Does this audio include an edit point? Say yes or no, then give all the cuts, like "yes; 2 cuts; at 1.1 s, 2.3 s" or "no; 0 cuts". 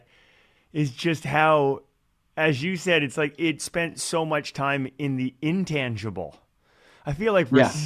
no; 0 cuts